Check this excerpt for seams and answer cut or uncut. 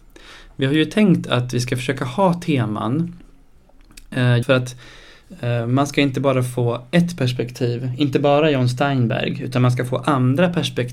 cut